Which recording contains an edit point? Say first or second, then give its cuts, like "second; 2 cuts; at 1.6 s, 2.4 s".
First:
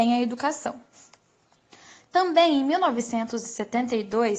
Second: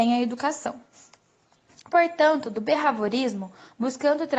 second; 1 cut; at 1.7 s